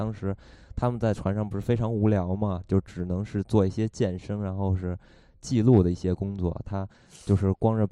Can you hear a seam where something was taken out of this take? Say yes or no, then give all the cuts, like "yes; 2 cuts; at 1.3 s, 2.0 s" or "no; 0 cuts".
yes; 1 cut; at 6.6 s